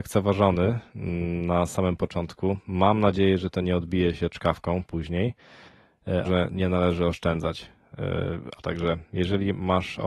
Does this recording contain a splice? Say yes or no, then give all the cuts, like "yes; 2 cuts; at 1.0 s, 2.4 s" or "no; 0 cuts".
yes; 2 cuts; at 6.2 s, 8.6 s